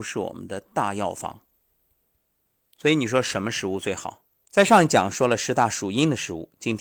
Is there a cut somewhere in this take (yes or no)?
yes